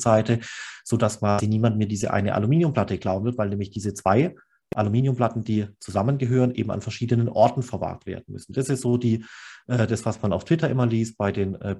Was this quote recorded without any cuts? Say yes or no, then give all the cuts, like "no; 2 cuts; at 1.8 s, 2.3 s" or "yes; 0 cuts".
yes; 0 cuts